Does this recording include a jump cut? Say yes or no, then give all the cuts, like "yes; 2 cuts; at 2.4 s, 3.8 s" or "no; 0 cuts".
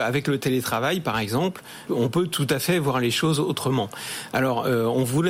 yes; 1 cut; at 1.9 s